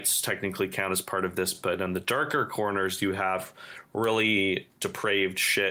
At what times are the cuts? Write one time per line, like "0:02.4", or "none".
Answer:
none